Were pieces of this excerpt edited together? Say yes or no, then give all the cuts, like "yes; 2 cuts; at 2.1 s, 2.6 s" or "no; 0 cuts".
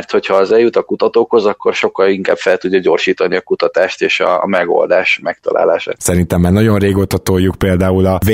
yes; 1 cut; at 6.0 s